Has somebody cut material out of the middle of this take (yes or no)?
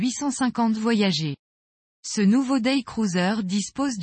no